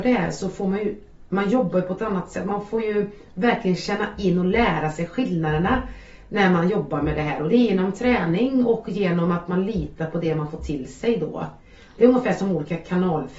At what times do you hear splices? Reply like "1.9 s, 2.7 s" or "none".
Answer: none